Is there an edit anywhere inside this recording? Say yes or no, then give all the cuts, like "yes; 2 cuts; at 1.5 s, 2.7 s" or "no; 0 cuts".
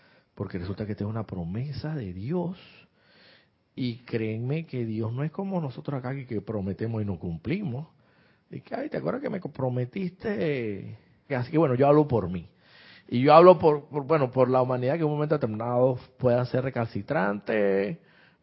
yes; 1 cut; at 11.3 s